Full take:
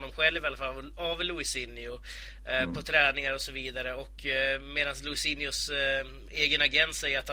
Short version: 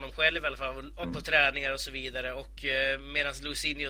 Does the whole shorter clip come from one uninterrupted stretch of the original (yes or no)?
no